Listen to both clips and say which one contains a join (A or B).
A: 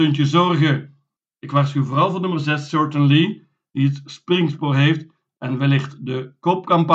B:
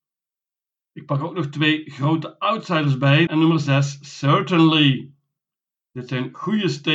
B